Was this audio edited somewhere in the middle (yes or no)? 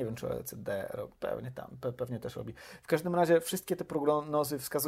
no